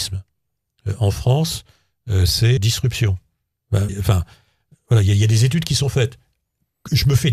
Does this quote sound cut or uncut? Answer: cut